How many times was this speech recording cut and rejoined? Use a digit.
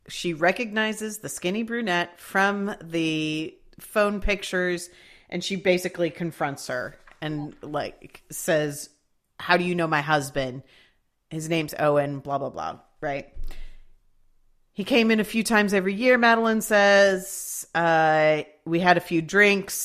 0